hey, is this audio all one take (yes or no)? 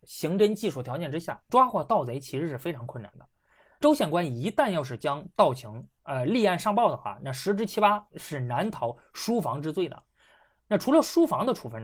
yes